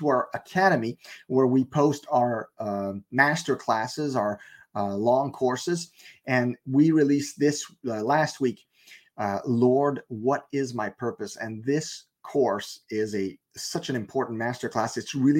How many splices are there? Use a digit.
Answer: 0